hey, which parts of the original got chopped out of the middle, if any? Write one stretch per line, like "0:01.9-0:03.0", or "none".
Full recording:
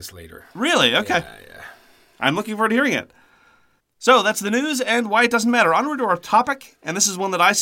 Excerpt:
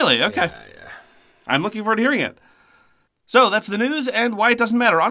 none